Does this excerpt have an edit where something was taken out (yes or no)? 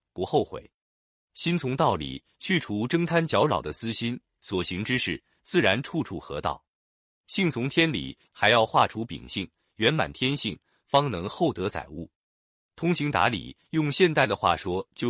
yes